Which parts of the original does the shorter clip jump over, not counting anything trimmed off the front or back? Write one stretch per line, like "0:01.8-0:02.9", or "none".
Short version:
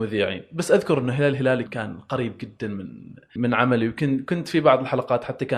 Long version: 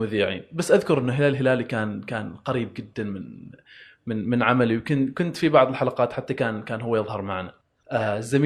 0:01.7-0:02.0
0:03.7-0:04.2